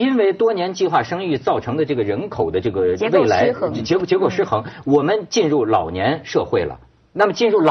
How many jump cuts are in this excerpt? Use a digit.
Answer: 1